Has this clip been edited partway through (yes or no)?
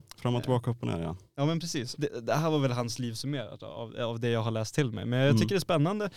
yes